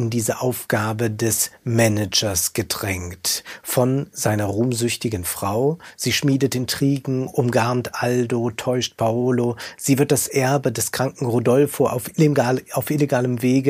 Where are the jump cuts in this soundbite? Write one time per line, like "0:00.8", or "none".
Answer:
none